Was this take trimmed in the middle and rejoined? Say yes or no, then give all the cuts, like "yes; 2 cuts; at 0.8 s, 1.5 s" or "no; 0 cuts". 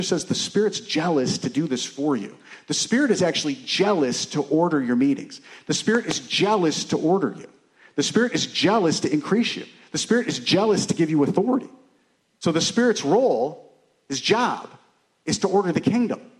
no; 0 cuts